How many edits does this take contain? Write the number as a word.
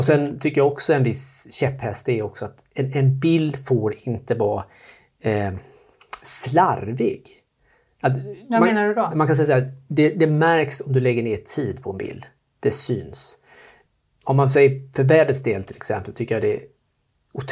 zero